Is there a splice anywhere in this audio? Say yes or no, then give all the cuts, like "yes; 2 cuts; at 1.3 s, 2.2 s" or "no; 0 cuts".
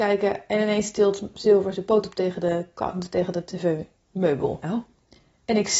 no; 0 cuts